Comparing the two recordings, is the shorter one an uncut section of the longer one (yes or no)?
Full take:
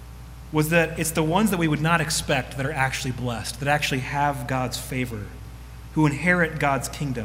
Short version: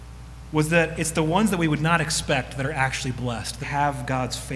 no